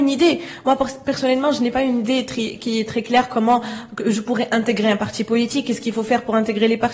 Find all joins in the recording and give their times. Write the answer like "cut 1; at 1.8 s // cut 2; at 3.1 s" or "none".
none

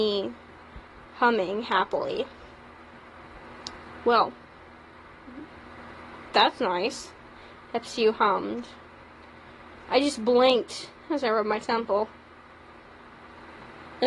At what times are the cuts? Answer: none

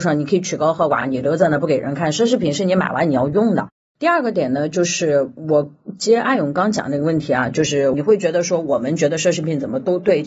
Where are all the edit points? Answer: none

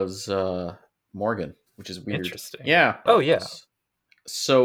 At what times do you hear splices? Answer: cut 1; at 1.7 s // cut 2; at 3.1 s

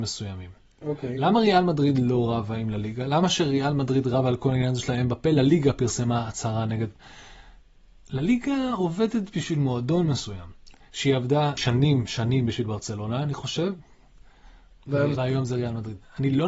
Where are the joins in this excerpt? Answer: cut 1; at 11.6 s // cut 2; at 15.2 s

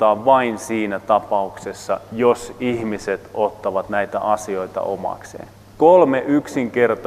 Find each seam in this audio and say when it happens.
cut 1; at 5.6 s

